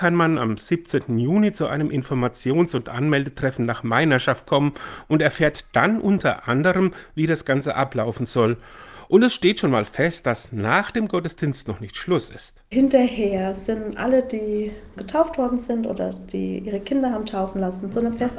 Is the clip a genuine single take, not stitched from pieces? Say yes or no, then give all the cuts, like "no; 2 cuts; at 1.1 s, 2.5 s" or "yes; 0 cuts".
yes; 0 cuts